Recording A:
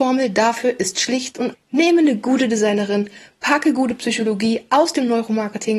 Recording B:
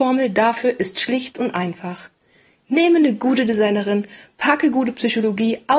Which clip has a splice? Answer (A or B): A